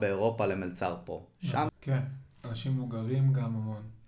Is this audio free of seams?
no; 1 cut; at 1.7 s

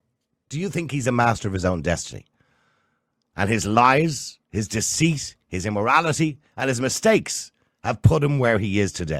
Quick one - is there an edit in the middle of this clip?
no; 0 cuts

